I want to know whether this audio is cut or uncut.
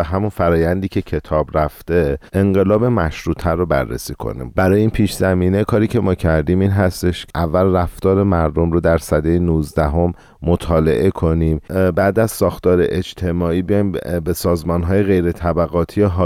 cut